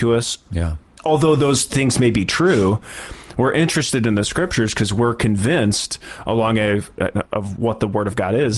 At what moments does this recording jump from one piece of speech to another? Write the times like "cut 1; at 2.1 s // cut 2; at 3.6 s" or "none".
cut 1; at 7.3 s